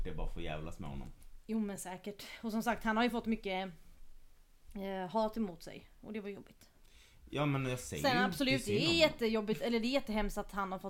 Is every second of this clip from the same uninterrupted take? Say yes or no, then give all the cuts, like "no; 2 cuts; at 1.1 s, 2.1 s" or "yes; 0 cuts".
yes; 0 cuts